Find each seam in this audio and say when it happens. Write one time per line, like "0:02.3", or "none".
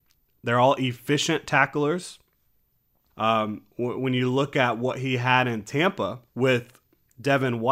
0:03.1
0:06.3